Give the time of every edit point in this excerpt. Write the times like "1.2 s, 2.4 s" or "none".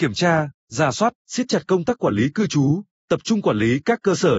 1.2 s, 3.0 s